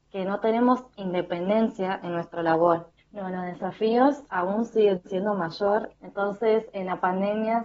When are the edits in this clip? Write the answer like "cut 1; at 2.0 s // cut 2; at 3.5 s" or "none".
cut 1; at 3.0 s // cut 2; at 5.9 s

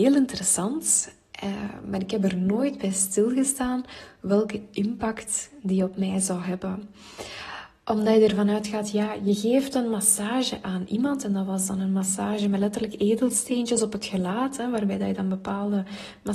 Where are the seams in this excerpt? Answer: none

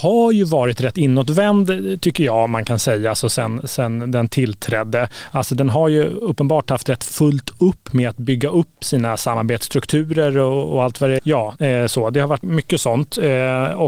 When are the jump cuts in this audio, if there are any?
cut 1; at 11.2 s // cut 2; at 12.4 s

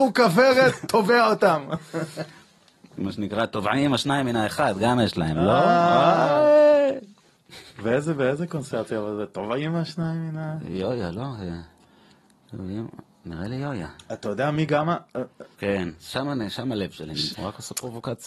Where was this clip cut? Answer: cut 1; at 15.5 s // cut 2; at 17.3 s

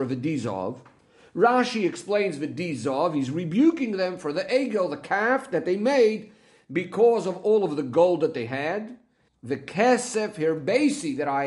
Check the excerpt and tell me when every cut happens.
cut 1; at 9.3 s

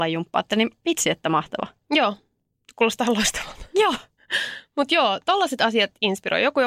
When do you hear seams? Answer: none

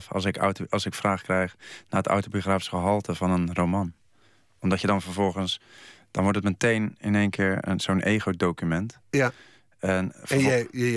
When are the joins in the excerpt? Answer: none

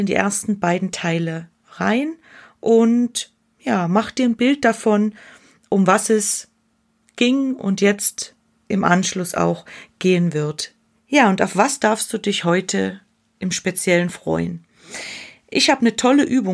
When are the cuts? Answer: cut 1; at 10.9 s

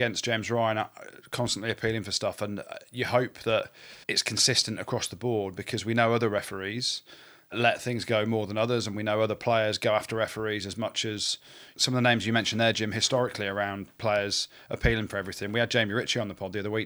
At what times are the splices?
cut 1; at 4.0 s

